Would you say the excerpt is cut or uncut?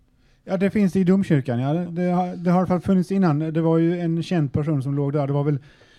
uncut